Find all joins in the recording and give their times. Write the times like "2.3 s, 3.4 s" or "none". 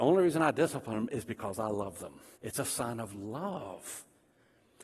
2.4 s